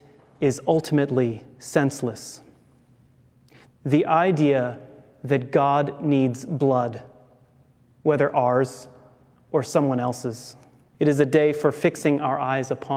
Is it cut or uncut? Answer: cut